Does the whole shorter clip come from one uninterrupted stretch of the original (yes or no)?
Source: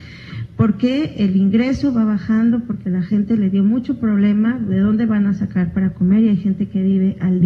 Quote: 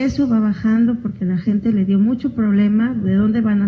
yes